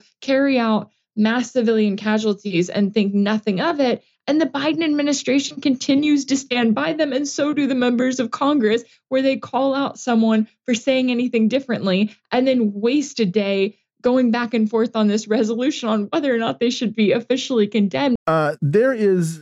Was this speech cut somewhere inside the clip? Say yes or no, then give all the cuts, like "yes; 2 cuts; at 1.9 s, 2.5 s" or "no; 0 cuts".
yes; 1 cut; at 18.2 s